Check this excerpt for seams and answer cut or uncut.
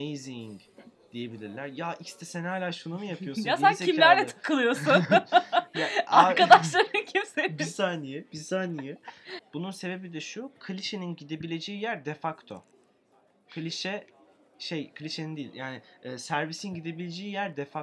cut